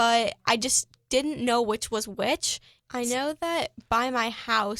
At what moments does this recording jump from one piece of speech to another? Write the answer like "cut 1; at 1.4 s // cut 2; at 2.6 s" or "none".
cut 1; at 2.8 s